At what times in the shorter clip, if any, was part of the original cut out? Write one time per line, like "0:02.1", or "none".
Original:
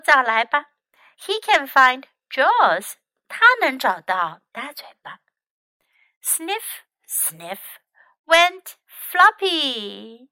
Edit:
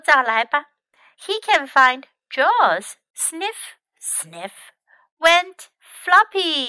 0:03.1